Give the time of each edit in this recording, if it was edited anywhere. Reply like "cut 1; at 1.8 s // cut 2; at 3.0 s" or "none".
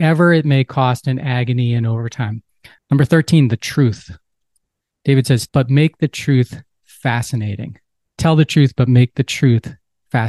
cut 1; at 2.8 s // cut 2; at 5.5 s